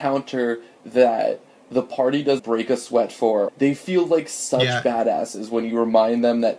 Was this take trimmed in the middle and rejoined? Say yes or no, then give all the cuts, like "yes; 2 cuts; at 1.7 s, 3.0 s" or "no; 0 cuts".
yes; 2 cuts; at 2.4 s, 3.5 s